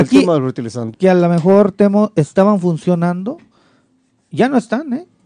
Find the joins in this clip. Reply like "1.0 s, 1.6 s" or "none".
0.9 s